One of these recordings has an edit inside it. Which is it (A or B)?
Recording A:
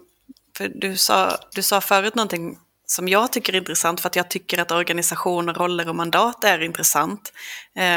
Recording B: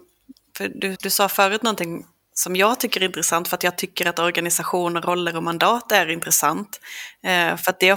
B